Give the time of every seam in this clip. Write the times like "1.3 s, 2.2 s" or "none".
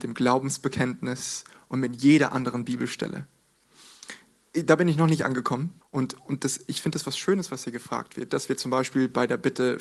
5.8 s, 8.3 s